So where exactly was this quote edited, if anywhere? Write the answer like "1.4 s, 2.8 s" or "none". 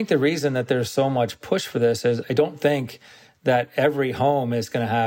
2.2 s